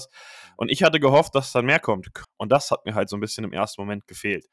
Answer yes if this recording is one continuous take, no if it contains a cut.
no